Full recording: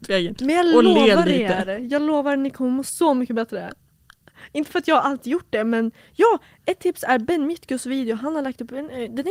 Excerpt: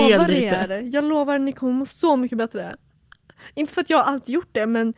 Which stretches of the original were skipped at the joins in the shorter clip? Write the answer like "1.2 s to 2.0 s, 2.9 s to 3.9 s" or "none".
none